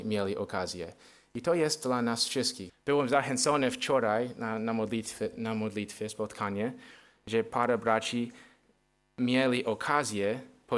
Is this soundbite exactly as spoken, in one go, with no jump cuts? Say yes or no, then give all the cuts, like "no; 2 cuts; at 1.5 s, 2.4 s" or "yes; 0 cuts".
no; 1 cut; at 2.7 s